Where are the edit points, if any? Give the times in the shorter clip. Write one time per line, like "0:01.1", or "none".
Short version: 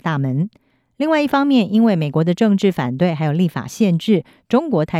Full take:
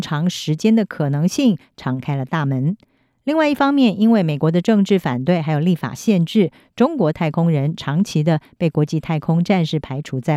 none